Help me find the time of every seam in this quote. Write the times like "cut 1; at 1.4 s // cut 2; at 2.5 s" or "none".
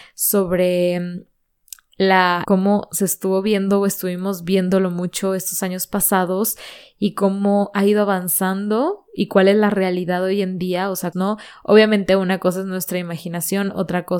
cut 1; at 2.4 s // cut 2; at 11.1 s